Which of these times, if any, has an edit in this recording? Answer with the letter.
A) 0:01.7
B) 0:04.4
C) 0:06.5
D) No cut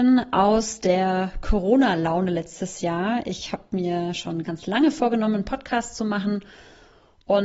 B